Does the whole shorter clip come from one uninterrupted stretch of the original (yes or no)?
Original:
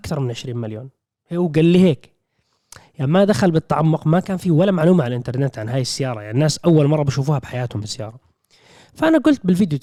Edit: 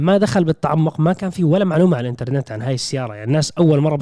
yes